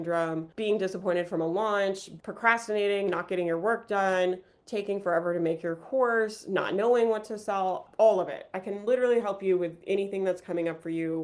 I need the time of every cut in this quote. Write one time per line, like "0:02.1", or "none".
0:02.2